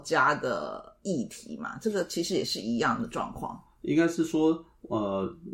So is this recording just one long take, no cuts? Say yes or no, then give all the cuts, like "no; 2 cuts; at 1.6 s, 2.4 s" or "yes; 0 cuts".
yes; 0 cuts